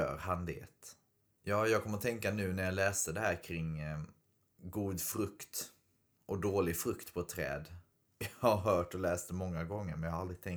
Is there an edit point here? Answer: yes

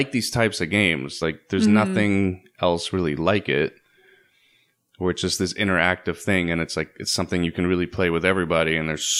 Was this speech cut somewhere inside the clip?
no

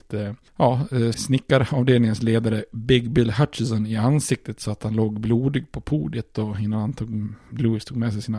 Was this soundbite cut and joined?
yes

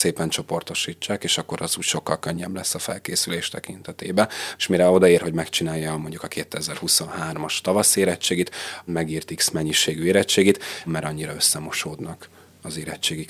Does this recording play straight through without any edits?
no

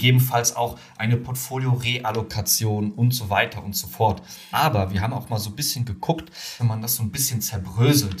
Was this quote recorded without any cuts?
no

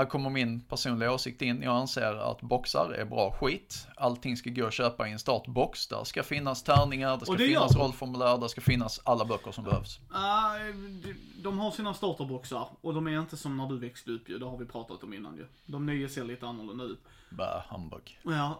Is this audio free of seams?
yes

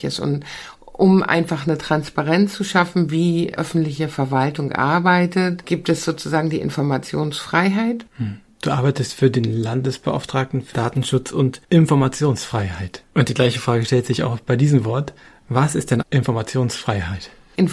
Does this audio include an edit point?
yes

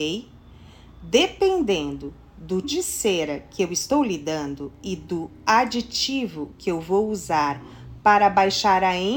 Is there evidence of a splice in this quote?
yes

